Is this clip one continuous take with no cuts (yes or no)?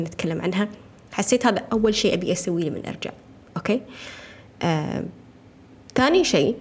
yes